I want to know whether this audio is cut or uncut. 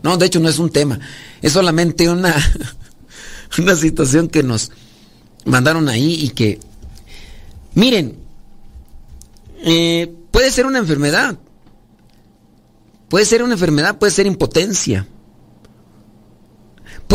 uncut